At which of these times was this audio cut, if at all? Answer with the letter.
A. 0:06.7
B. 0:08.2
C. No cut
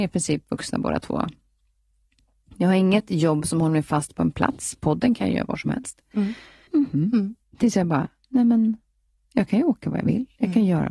A